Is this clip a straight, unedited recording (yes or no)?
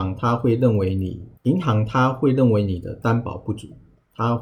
no